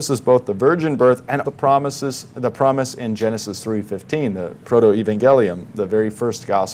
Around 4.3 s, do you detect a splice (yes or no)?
no